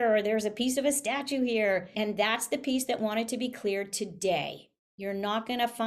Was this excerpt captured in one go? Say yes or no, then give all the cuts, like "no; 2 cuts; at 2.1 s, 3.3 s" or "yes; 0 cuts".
yes; 0 cuts